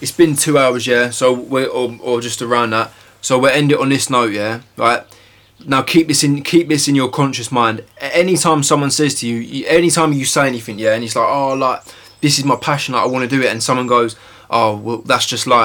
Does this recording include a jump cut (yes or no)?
no